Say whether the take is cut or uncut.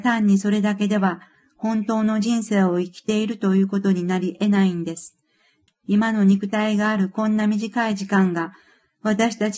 cut